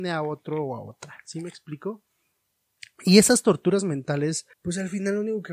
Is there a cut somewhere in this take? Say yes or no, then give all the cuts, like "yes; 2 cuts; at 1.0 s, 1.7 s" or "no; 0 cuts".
yes; 1 cut; at 4.5 s